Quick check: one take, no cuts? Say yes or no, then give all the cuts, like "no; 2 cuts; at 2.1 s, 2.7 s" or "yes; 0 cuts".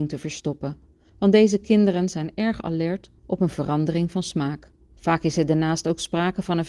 no; 2 cuts; at 1.1 s, 4.9 s